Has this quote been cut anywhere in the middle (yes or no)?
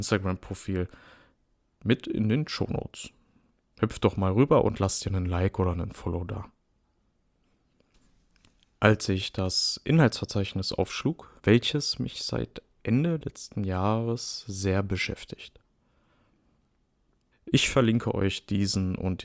yes